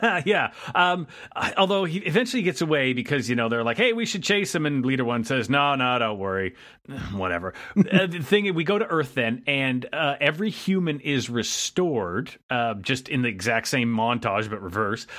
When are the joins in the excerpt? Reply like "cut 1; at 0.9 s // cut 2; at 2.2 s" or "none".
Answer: none